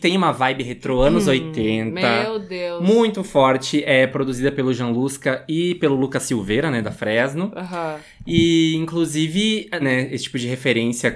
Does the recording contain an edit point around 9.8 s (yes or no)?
yes